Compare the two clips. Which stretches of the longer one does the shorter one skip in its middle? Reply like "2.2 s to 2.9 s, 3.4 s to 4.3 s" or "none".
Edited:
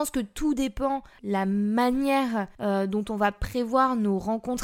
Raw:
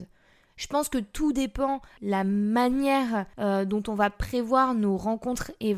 none